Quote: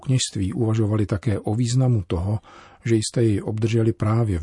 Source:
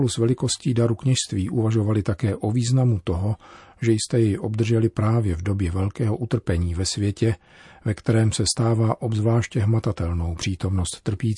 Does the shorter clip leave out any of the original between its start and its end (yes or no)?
no